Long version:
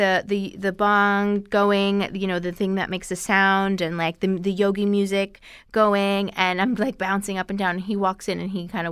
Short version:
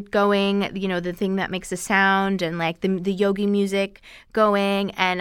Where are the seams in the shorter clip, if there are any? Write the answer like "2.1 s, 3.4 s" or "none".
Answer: none